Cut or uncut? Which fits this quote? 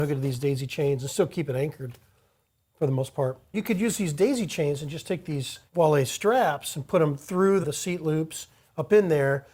cut